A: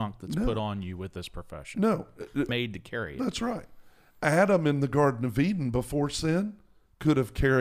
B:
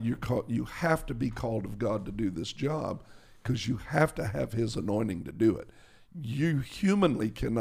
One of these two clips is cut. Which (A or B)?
A